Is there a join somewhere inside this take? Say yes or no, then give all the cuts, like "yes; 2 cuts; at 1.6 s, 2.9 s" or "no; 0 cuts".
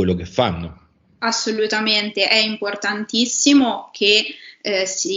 no; 0 cuts